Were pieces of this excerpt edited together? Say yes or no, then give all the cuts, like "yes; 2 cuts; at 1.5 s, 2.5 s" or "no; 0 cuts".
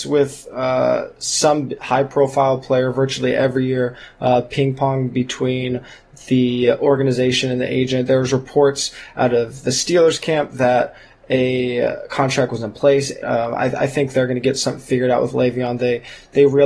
yes; 1 cut; at 13.2 s